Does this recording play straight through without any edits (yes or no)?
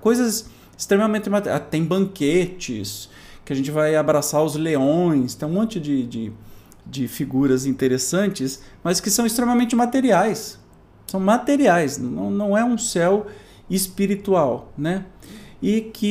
yes